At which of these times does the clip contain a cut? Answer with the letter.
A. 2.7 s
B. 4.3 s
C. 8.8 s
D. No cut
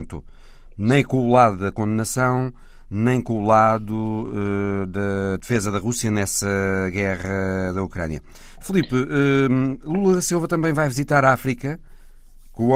D